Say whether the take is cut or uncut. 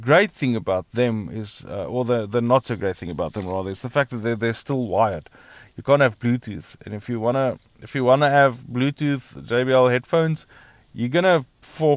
uncut